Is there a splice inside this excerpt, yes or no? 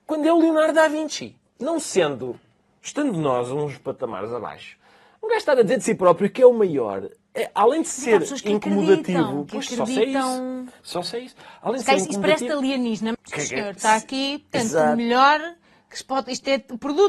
yes